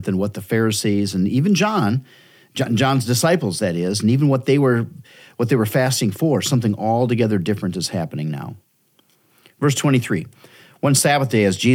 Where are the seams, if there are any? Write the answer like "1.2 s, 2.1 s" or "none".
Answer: none